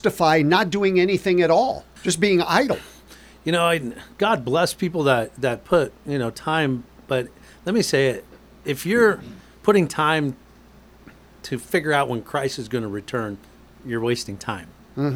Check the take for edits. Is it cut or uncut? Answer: cut